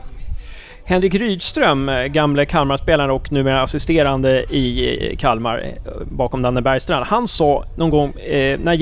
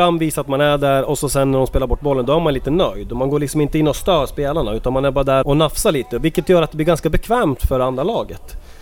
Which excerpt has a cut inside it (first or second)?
second